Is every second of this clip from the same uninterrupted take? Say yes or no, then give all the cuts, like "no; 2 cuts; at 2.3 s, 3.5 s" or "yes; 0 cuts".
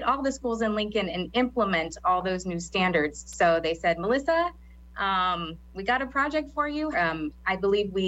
no; 1 cut; at 6.9 s